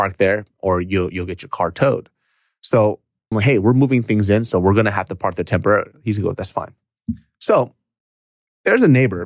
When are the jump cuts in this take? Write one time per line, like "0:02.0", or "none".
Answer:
0:03.3